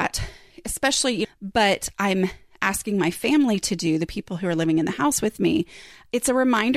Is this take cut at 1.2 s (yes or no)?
yes